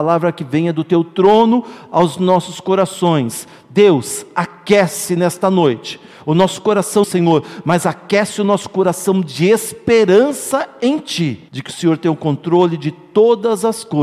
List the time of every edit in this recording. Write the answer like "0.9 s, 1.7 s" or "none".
7.0 s, 11.5 s